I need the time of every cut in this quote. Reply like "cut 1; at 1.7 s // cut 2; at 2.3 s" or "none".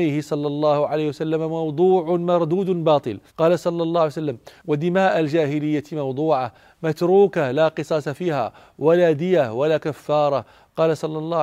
cut 1; at 3.3 s